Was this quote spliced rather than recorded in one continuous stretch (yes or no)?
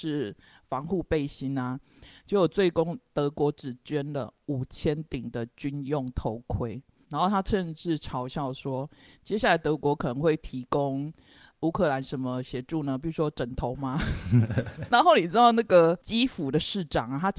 yes